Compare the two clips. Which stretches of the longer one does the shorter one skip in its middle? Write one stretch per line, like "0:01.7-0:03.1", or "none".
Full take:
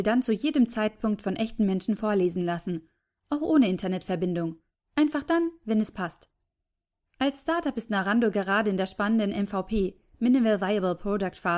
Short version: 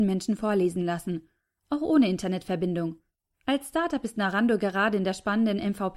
0:04.8-0:07.0